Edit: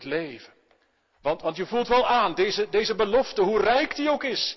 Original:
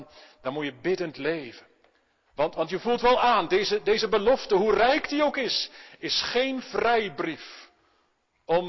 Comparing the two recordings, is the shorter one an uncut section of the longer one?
yes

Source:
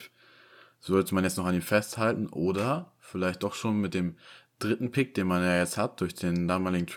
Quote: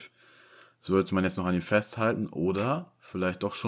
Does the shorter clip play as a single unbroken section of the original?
yes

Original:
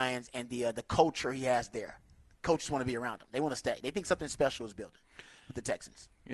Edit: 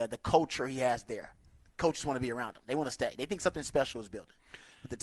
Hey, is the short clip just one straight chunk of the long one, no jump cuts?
yes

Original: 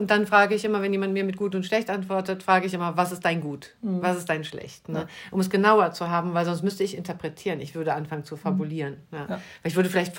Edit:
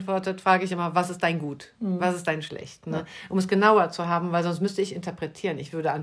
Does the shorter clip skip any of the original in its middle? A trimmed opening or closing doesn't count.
no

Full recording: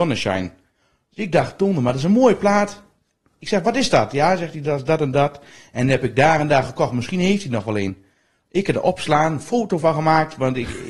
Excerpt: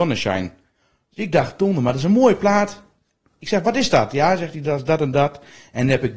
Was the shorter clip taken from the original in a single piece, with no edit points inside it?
yes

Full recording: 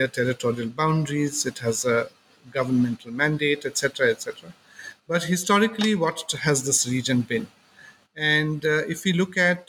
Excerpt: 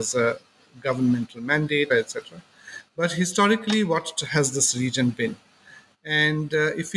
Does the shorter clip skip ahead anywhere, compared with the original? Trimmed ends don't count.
yes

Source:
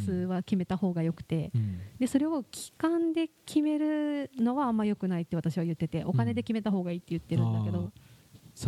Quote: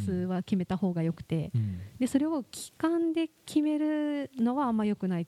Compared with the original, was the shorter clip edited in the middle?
no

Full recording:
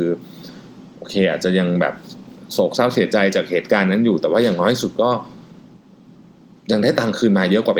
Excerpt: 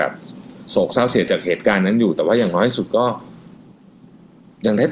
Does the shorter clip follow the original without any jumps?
no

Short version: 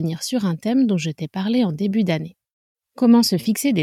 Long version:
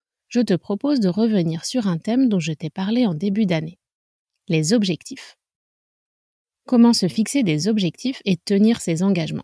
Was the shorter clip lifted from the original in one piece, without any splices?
no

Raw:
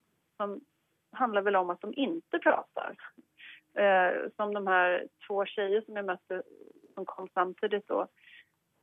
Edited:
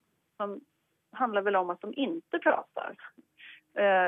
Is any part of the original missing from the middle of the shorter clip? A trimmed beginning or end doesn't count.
no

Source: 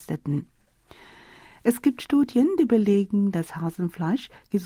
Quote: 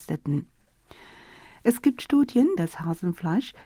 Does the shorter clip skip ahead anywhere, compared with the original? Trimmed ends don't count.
yes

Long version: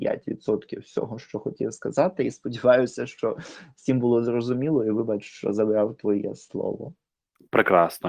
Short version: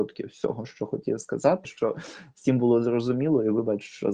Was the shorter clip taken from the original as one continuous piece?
no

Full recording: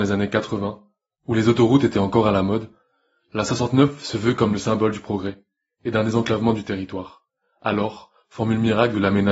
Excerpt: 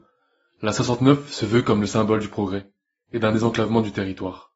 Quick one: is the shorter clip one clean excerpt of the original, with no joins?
yes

